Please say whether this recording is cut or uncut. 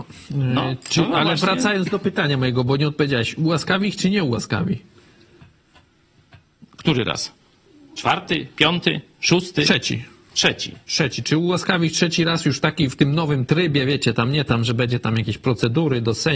uncut